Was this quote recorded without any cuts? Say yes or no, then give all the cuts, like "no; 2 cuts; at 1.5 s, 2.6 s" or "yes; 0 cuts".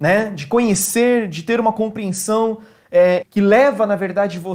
no; 1 cut; at 3.2 s